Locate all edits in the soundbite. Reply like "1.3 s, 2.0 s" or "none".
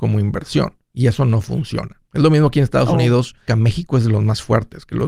2.1 s, 3.5 s